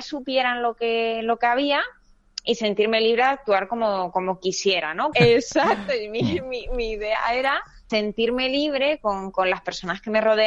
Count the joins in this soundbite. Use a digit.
2